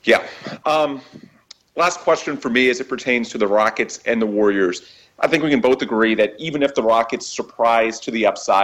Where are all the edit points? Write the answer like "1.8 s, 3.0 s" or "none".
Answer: none